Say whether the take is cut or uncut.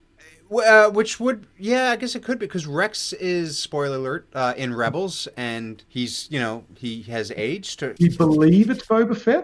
cut